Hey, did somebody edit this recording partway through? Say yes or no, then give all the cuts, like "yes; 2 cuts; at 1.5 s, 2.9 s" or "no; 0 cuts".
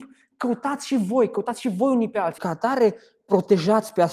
yes; 1 cut; at 2.4 s